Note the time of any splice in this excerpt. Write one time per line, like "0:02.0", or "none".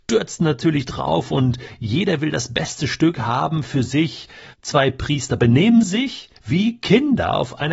0:04.5
0:06.4